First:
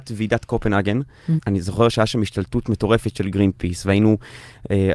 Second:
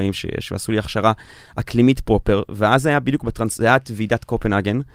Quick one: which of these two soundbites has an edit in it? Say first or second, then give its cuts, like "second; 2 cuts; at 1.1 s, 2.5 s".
first; 1 cut; at 1.4 s